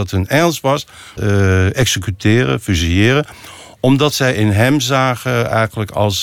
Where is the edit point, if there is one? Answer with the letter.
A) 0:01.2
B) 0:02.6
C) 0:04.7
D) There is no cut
A